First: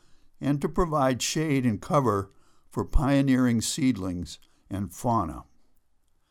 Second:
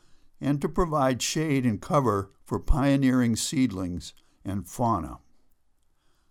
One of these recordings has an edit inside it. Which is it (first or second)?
second